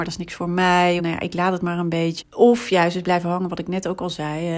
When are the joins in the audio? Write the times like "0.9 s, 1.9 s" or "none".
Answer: 1.0 s, 2.2 s

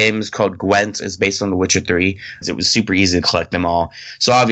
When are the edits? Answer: 2.4 s

